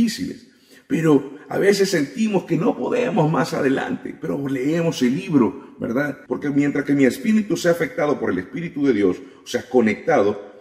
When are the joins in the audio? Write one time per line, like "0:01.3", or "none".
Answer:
0:06.3

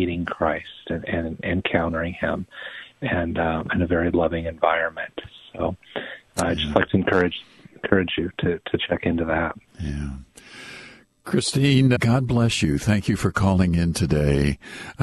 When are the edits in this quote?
0:09.7
0:11.9

